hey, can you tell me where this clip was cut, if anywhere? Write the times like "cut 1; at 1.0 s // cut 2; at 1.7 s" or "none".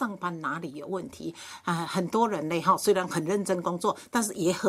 none